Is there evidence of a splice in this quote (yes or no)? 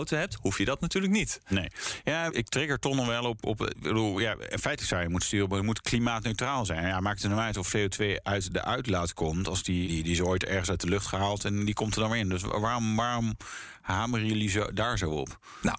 yes